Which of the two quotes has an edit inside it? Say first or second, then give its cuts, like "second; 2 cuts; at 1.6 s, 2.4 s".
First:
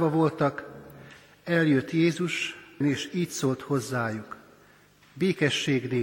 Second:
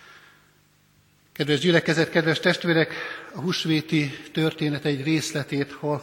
first; 1 cut; at 2.8 s